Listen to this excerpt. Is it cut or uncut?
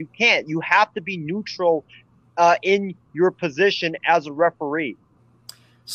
uncut